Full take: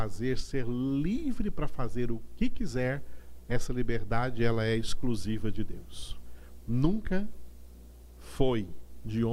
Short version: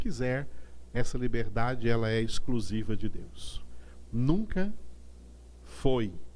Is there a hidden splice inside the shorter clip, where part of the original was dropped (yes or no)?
no